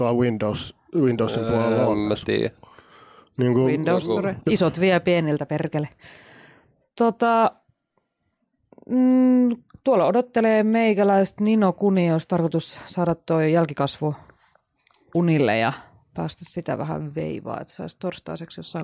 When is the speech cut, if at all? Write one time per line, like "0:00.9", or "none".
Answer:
0:04.5

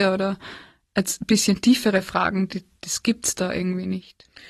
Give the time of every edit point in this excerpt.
none

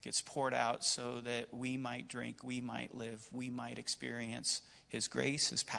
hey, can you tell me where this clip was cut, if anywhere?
none

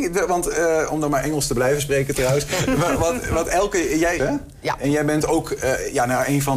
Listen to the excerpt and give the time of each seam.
0:04.2

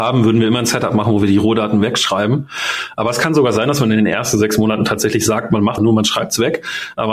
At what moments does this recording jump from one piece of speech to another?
0:05.8

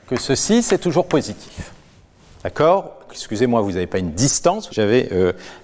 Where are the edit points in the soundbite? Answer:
0:03.1
0:04.7

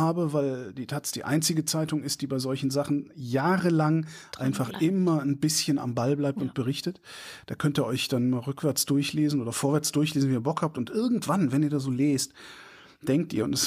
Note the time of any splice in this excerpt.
none

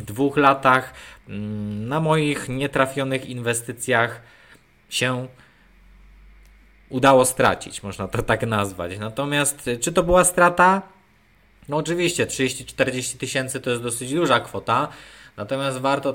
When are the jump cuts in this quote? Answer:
none

